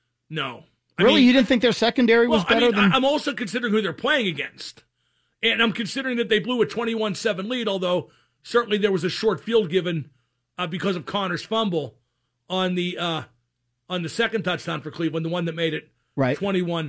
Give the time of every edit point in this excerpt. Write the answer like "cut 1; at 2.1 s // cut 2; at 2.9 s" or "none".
none